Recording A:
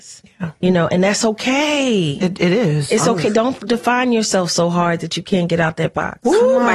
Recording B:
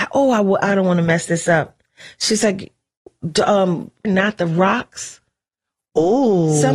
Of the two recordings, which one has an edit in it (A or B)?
B